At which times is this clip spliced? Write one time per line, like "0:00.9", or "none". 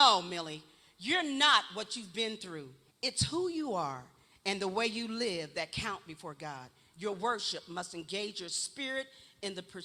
0:02.9